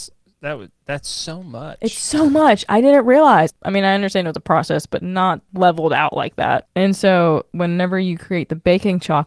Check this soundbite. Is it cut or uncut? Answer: cut